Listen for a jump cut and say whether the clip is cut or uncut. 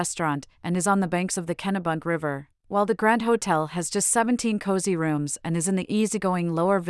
uncut